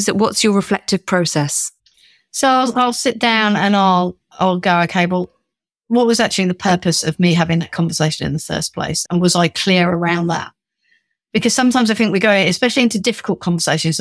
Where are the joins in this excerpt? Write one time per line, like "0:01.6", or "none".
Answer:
0:09.1